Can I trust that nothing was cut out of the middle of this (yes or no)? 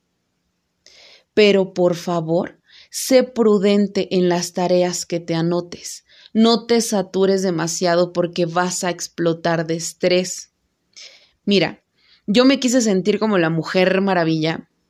yes